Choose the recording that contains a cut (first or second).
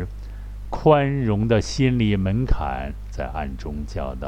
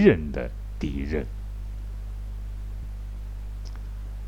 second